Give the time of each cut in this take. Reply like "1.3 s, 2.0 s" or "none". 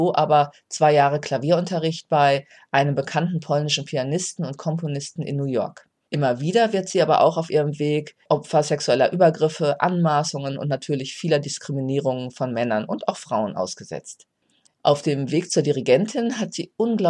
14.7 s

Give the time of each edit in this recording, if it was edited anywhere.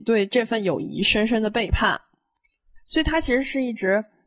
none

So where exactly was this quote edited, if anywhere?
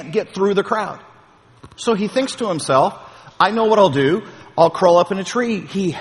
none

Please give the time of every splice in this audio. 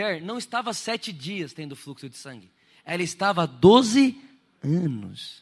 none

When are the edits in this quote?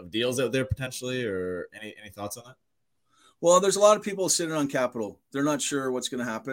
none

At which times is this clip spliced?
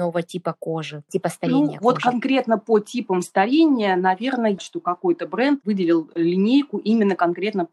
4.6 s

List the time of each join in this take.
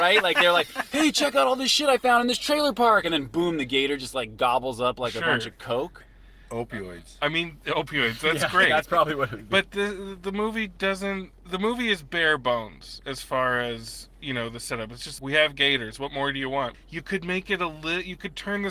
15.2 s, 16.7 s

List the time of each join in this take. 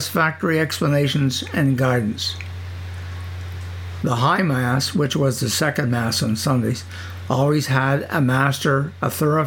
none

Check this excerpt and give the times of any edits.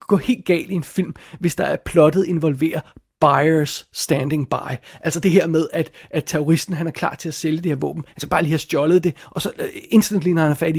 none

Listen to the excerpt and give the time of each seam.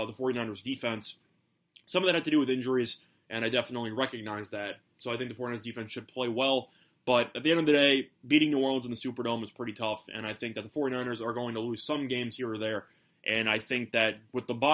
none

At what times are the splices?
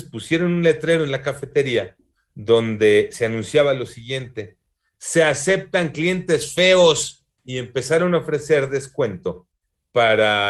none

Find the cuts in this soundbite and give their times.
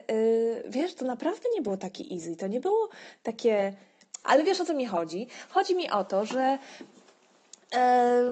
4.2 s

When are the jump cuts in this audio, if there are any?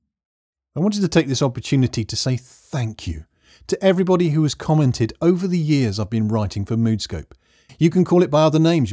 7.7 s

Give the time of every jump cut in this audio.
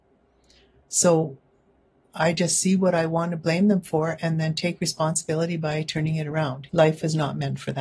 6.7 s

